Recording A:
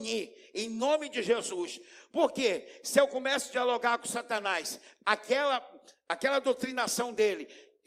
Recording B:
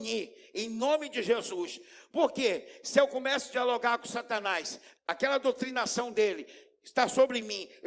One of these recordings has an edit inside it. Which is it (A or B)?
B